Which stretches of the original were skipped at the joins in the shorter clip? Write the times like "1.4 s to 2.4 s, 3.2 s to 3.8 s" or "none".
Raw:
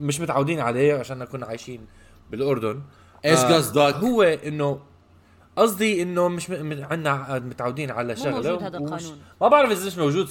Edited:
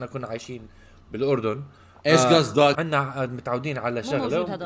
3.9 s to 6.9 s